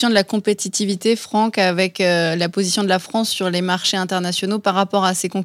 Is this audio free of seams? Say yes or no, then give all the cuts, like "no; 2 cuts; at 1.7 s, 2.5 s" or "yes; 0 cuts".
yes; 0 cuts